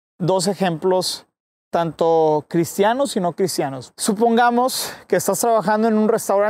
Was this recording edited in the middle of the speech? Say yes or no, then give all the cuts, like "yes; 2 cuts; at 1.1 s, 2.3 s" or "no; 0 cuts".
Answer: yes; 1 cut; at 3.9 s